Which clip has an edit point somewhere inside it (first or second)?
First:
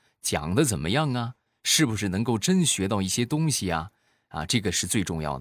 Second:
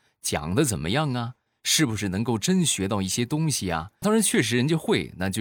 second